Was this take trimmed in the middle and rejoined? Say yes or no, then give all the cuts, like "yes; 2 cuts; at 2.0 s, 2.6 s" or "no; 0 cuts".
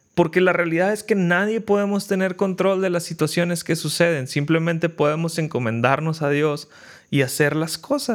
no; 0 cuts